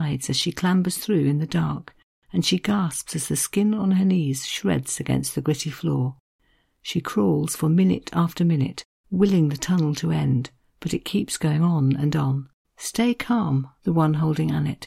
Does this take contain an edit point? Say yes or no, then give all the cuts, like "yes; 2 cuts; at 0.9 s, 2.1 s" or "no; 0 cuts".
yes; 2 cuts; at 12.6 s, 13.8 s